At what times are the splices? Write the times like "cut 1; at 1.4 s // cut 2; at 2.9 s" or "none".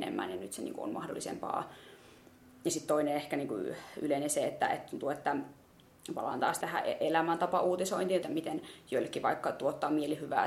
cut 1; at 6.6 s // cut 2; at 8.2 s